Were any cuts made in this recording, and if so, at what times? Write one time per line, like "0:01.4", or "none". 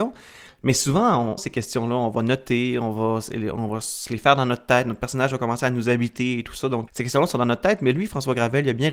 0:01.4
0:06.9

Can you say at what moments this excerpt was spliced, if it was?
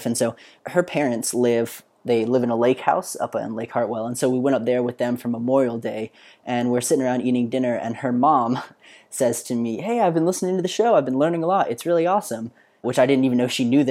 none

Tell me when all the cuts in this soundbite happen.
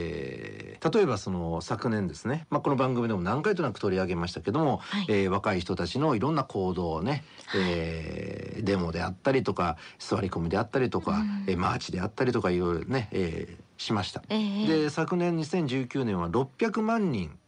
0:14.3

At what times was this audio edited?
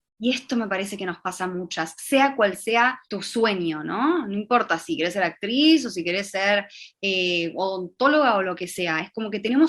0:03.0

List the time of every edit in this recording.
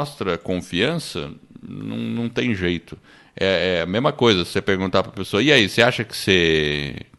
none

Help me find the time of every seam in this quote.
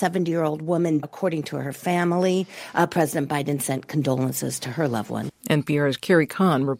0:01.0

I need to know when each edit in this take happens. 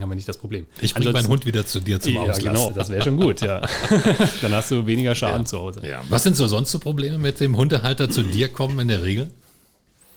0:02.7

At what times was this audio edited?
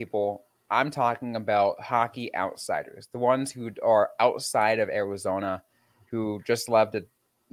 none

